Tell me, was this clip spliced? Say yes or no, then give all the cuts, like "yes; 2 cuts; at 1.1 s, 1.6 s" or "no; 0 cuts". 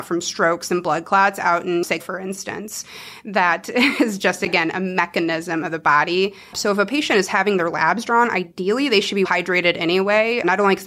yes; 3 cuts; at 2.0 s, 6.5 s, 9.2 s